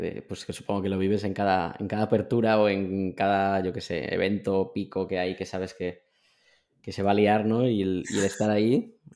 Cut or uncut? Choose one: uncut